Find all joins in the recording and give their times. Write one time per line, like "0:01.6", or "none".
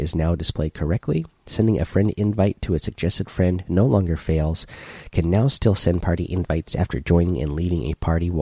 none

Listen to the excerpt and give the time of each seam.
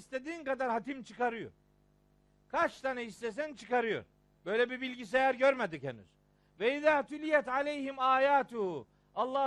0:04.3

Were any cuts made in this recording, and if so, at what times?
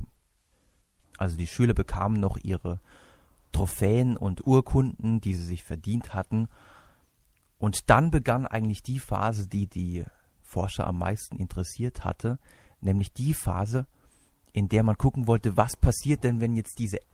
0:01.0

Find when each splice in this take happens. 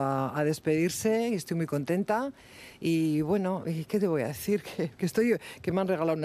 none

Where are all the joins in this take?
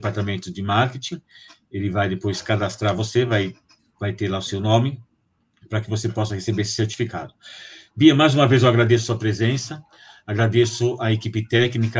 none

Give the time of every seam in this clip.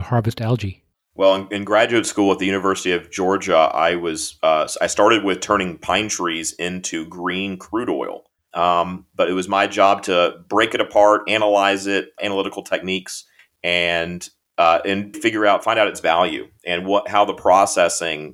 0:08.5
0:12.2
0:15.1

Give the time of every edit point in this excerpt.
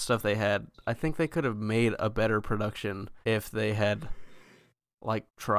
0:03.2

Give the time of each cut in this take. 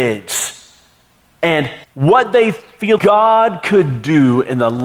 0:01.8
0:03.0

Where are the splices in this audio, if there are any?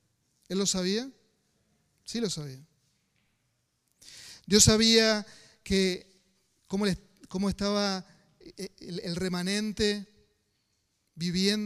none

